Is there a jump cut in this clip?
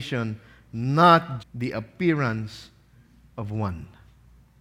yes; 1 cut; at 1.4 s

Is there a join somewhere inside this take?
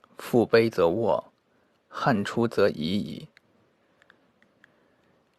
yes; 1 cut; at 4.3 s

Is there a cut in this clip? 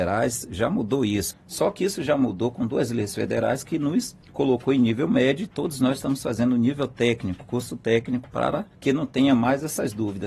yes; 3 cuts; at 1.3 s, 4.2 s, 8.7 s

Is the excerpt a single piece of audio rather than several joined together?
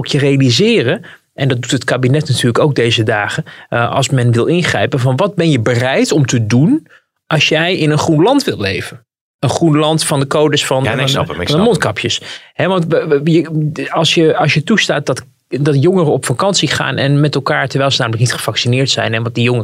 yes; 0 cuts

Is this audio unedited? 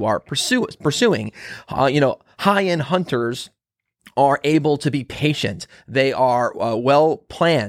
yes; 0 cuts

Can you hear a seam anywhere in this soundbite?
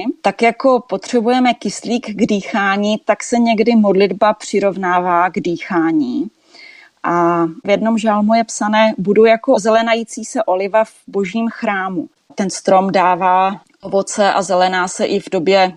yes; 1 cut; at 12.3 s

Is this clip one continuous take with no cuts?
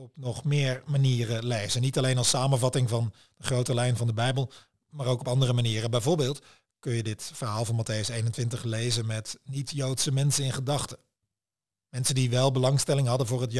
yes; 0 cuts

